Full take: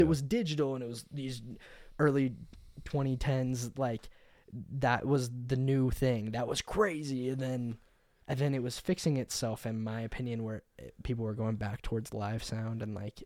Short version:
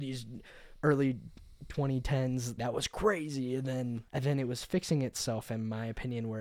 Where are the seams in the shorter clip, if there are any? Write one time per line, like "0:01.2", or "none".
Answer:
0:02.6
0:04.1